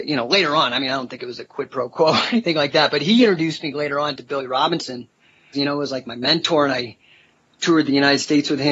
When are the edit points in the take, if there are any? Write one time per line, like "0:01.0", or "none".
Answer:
0:05.5